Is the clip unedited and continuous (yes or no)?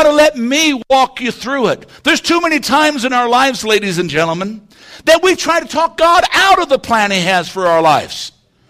yes